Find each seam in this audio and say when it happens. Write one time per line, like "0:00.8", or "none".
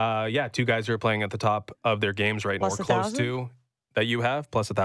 0:02.6